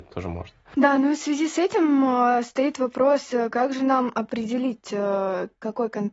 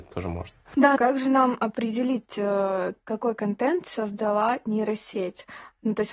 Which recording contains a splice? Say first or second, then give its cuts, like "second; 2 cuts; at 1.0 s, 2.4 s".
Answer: second; 1 cut; at 1.0 s